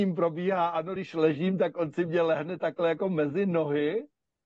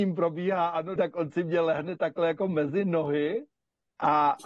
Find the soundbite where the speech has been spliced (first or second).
second